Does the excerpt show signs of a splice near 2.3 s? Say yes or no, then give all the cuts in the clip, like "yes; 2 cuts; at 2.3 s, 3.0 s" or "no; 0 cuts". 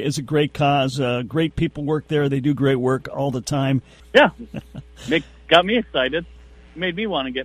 no; 1 cut; at 4.0 s